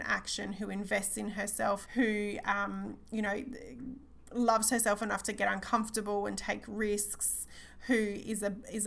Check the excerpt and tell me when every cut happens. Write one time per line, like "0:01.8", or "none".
0:01.9

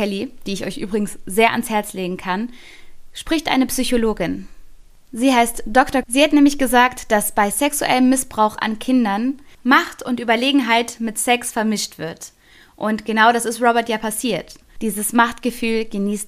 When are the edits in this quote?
0:06.0
0:14.8

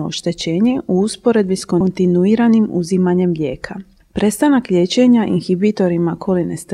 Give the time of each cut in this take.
none

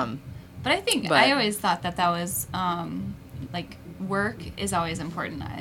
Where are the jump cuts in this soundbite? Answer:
0:03.5

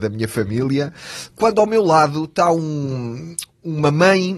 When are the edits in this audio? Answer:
none

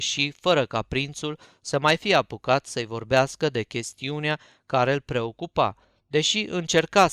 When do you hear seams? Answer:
none

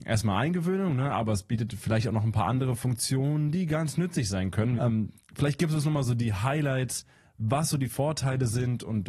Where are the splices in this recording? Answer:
0:04.8

